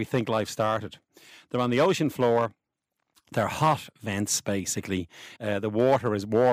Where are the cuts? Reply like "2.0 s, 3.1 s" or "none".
5.4 s